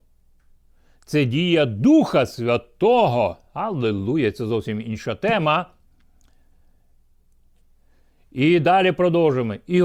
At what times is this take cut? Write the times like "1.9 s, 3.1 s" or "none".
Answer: none